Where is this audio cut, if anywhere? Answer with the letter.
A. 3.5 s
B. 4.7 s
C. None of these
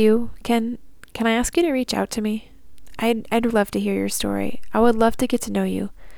A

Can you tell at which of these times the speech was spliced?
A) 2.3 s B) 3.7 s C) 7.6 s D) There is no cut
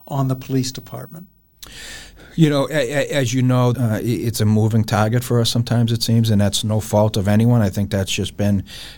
B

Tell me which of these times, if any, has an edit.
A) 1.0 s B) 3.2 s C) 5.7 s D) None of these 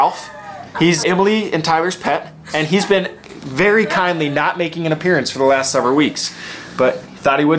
A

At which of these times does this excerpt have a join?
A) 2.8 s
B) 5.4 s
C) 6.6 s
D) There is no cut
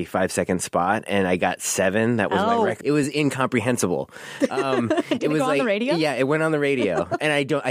A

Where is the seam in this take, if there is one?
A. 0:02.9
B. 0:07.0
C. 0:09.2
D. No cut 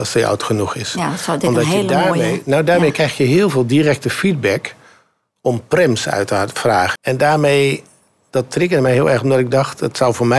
B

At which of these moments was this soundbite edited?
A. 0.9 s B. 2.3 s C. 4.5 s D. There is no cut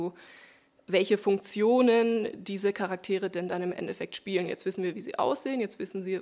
D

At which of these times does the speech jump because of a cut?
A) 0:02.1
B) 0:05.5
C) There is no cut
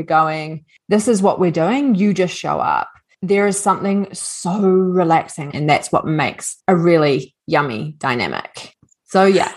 B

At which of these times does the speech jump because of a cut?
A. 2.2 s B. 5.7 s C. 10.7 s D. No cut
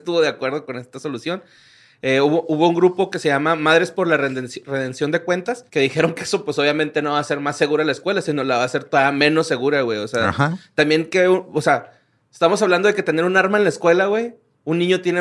B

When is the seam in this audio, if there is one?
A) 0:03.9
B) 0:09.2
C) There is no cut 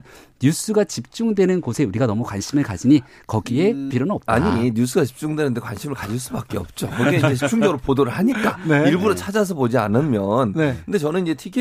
A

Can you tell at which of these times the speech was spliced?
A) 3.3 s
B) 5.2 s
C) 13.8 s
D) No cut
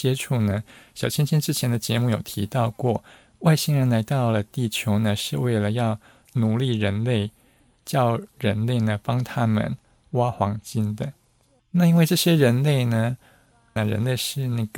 C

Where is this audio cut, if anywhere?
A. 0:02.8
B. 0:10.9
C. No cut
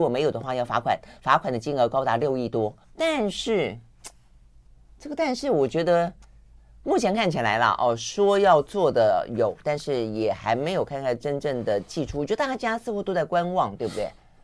A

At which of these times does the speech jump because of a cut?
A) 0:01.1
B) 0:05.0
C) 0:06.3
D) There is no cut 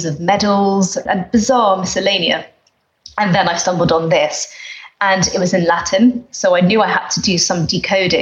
A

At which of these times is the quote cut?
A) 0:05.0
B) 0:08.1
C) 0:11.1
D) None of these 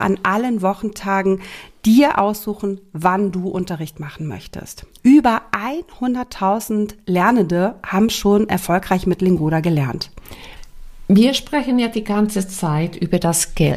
A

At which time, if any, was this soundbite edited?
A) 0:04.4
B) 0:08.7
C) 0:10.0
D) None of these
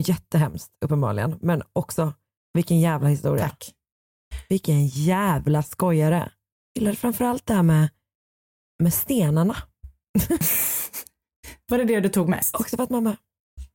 D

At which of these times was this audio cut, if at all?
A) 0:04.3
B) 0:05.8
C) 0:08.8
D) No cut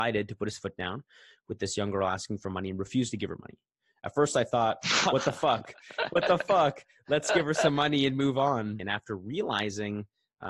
C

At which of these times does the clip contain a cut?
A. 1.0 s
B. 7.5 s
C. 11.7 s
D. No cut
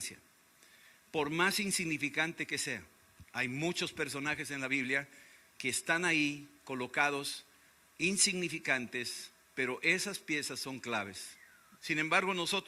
C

